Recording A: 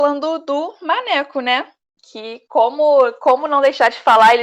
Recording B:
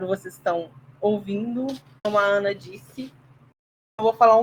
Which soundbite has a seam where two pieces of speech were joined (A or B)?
B